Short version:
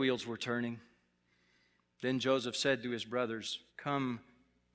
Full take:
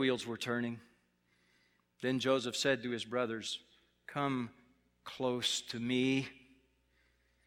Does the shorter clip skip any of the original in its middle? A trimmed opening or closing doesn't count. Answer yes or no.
yes